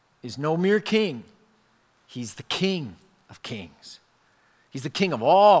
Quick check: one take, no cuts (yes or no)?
yes